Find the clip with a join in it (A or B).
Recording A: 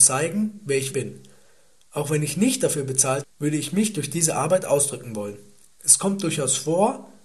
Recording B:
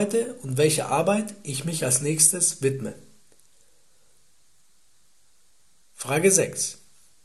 A